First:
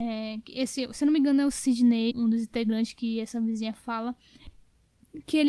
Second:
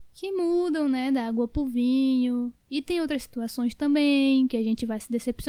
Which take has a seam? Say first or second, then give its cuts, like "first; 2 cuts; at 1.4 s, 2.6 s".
first; 1 cut; at 2.1 s